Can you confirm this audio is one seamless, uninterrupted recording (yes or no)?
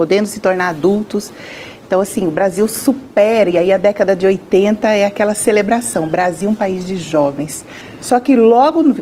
yes